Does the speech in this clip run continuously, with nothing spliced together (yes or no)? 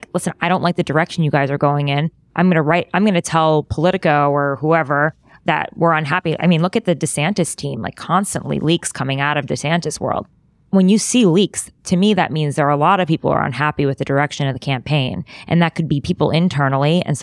yes